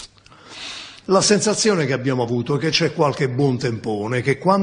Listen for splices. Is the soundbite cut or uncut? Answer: cut